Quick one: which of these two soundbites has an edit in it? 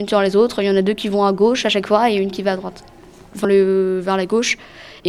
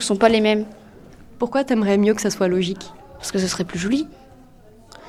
first; 1 cut; at 3.4 s

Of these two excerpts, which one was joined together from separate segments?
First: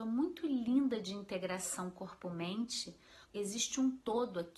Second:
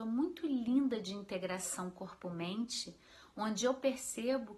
first; 1 cut; at 3.2 s

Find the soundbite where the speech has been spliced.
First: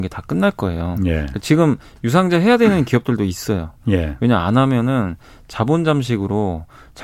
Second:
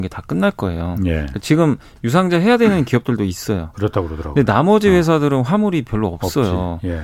second; 1 cut; at 3.7 s

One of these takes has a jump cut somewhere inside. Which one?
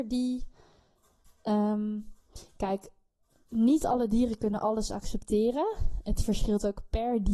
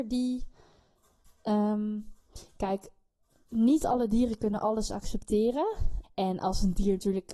second; 1 cut; at 6.0 s

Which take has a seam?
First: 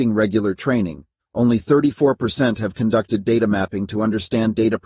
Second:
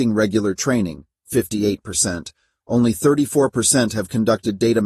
first; 1 cut; at 1.2 s

